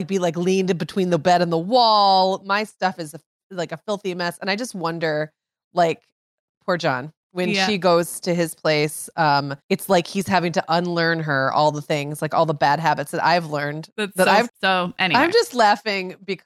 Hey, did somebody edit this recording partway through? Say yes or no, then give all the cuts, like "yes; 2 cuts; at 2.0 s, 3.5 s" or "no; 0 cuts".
yes; 2 cuts; at 9.6 s, 14.5 s